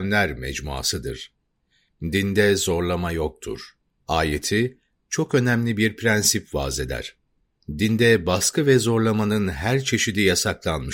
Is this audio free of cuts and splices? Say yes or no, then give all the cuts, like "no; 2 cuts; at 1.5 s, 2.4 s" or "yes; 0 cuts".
yes; 0 cuts